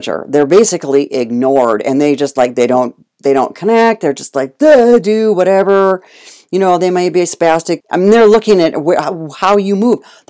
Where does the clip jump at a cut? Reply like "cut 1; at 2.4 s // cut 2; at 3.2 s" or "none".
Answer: cut 1; at 7.8 s